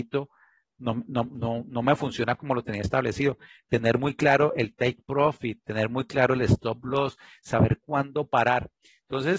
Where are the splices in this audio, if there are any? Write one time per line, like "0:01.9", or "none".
none